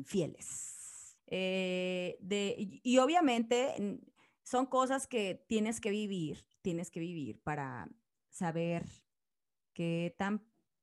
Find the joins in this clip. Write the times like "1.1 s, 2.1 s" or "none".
1.2 s